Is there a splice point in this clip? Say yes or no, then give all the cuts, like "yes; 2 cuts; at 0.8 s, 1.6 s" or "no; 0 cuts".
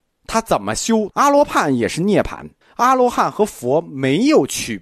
yes; 2 cuts; at 1.1 s, 2.6 s